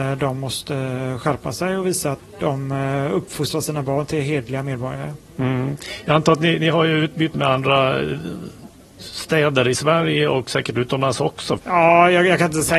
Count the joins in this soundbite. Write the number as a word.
three